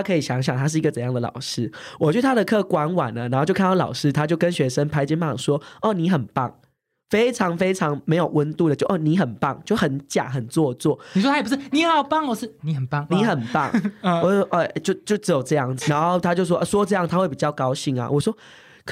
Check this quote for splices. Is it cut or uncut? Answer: cut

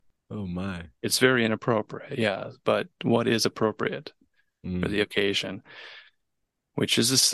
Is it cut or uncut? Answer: uncut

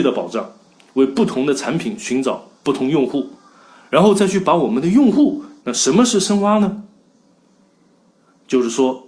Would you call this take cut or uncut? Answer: cut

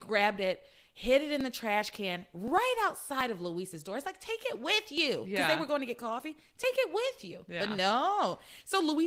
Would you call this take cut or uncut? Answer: uncut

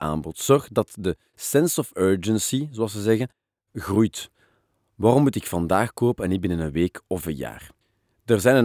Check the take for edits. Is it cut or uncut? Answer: uncut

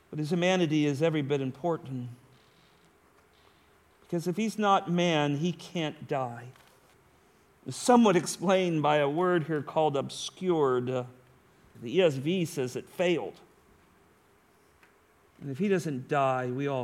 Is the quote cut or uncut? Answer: cut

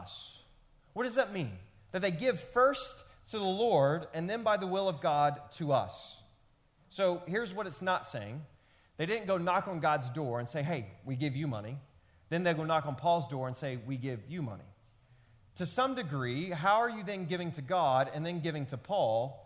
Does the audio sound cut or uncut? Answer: uncut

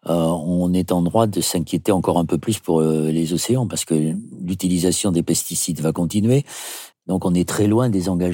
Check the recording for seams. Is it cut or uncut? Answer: cut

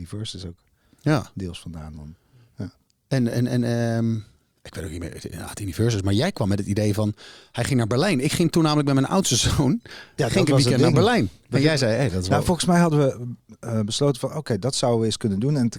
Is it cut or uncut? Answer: uncut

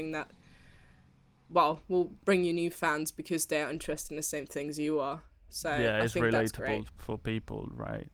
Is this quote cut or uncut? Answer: cut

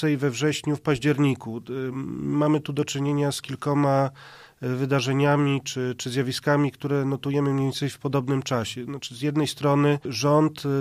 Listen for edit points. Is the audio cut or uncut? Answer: uncut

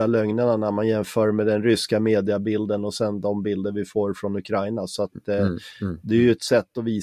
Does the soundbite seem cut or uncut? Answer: uncut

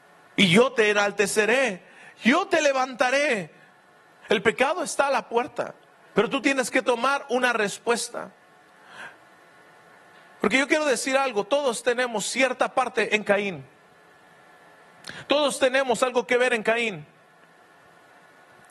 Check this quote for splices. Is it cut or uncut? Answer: cut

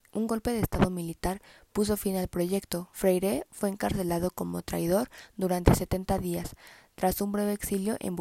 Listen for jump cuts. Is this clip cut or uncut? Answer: uncut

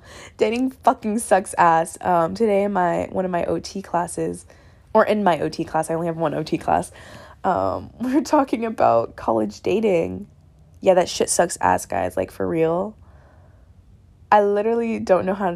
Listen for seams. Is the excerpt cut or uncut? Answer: uncut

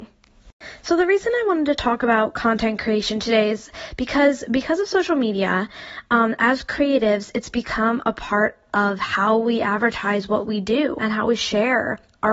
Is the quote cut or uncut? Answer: cut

